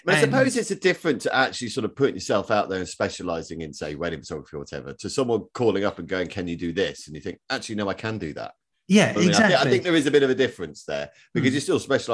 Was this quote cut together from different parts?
no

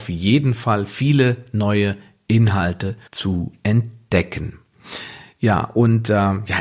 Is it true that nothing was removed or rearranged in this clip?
no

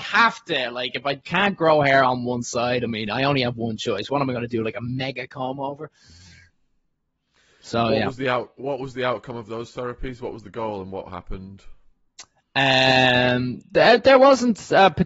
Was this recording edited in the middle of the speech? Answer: no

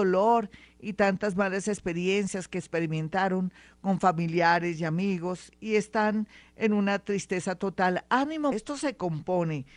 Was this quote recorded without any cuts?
no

